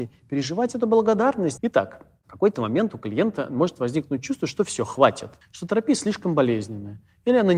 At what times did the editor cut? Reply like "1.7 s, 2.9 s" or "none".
1.6 s, 5.4 s